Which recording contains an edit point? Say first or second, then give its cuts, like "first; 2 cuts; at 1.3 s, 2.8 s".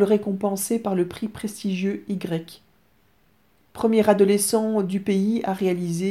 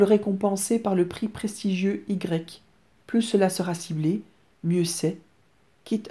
second; 1 cut; at 3.0 s